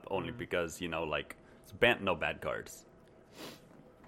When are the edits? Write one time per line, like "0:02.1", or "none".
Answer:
none